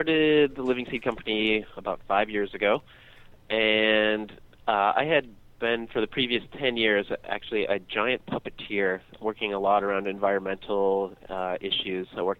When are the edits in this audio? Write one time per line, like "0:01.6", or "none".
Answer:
0:09.2